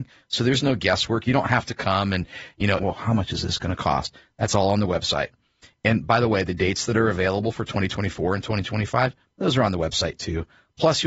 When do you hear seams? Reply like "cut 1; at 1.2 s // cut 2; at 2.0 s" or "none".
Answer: cut 1; at 2.8 s